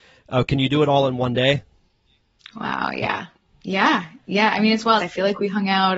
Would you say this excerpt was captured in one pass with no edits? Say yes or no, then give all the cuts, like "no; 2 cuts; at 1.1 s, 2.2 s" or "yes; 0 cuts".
no; 1 cut; at 5.0 s